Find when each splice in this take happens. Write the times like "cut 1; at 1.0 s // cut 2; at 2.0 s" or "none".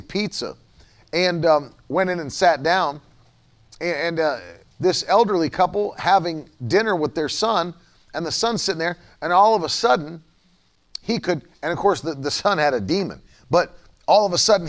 cut 1; at 4.7 s